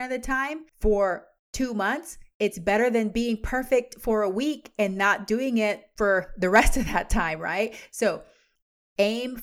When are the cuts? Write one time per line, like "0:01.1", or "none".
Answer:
none